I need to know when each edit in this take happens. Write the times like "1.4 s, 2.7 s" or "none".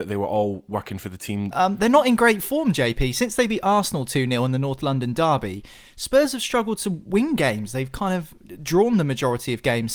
1.5 s